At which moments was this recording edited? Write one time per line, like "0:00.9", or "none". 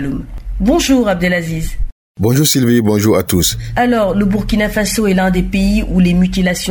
none